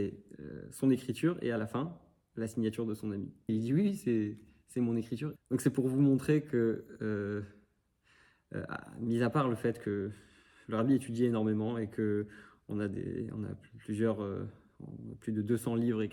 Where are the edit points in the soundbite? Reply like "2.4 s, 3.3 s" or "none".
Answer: 3.5 s, 5.4 s